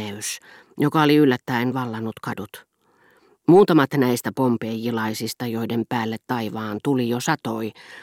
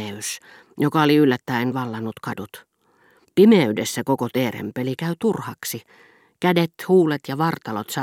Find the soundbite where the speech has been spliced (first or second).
second